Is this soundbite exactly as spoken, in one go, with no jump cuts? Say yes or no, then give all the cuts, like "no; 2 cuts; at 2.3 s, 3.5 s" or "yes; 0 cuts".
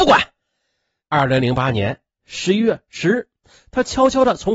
no; 1 cut; at 1.0 s